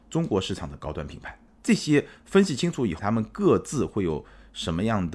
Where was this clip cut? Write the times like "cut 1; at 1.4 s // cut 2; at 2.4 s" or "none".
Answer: cut 1; at 1.5 s // cut 2; at 3.0 s